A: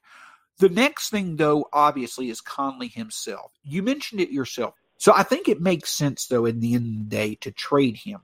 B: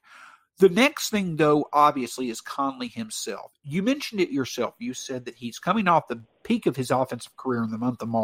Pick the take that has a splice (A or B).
A